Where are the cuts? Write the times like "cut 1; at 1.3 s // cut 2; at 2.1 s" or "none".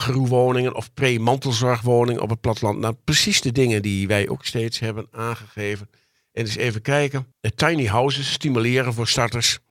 none